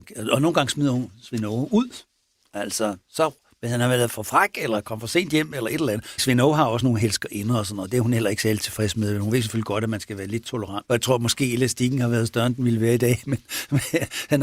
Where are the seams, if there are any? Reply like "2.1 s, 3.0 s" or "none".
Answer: 6.2 s, 10.9 s